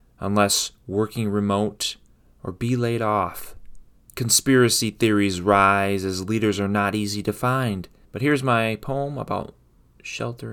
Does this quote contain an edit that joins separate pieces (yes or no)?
yes